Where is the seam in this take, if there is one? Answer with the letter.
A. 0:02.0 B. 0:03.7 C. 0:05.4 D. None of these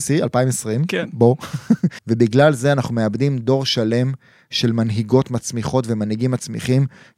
A